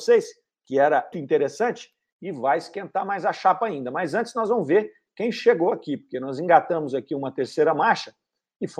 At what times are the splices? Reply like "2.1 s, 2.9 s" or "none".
1.1 s